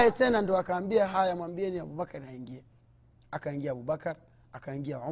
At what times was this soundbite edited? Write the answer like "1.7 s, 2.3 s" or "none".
none